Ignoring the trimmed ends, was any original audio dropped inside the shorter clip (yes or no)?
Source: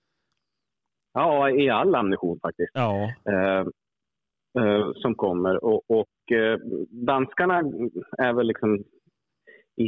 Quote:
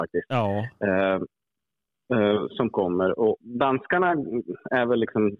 yes